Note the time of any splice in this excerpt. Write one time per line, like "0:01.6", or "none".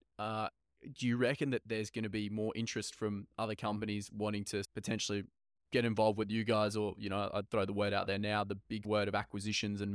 none

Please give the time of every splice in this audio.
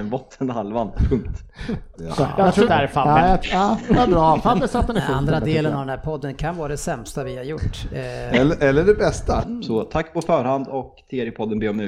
0:02.7
0:09.4

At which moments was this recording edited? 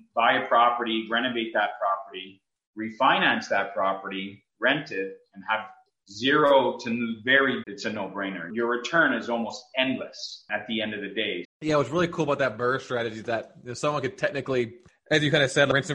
0:07.6
0:11.4

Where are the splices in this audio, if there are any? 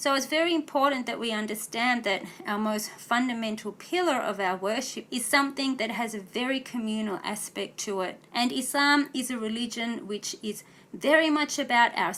0:05.1
0:08.3

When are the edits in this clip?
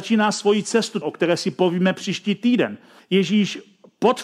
0:01.0
0:03.0

